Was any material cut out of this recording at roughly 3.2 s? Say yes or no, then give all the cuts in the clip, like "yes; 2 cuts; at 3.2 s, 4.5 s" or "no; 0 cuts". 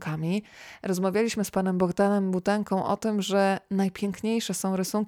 no; 0 cuts